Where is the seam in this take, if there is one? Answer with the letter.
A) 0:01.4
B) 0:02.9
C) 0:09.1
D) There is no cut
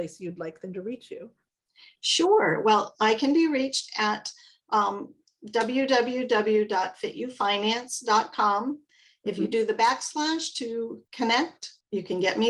D